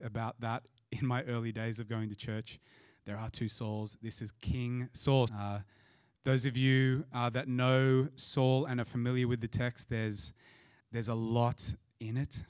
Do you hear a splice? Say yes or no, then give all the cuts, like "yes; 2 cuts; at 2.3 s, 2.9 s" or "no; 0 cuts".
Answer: yes; 2 cuts; at 5.3 s, 10.8 s